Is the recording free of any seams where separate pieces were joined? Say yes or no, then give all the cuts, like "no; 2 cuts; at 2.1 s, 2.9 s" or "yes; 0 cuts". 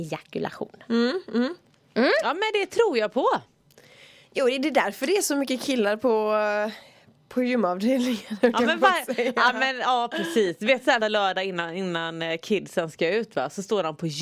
no; 1 cut; at 11.0 s